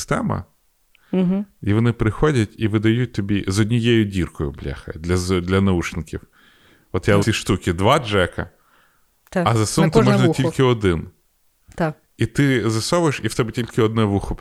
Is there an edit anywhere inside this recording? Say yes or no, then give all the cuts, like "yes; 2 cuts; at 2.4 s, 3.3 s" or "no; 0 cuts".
yes; 1 cut; at 7.2 s